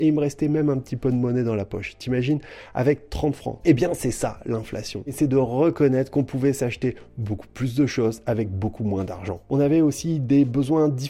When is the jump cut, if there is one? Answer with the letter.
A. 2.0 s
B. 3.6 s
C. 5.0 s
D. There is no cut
B